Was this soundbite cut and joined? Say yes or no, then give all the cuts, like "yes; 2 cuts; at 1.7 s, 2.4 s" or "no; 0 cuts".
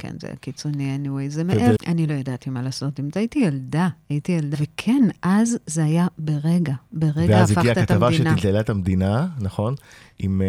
yes; 2 cuts; at 1.8 s, 4.5 s